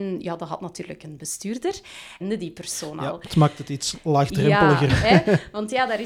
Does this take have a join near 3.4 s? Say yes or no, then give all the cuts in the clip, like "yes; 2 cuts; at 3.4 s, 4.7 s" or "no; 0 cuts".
no; 2 cuts; at 2.2 s, 4.9 s